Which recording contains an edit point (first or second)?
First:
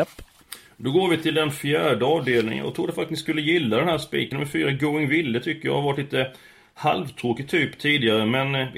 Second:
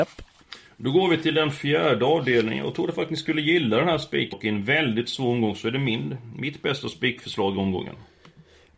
second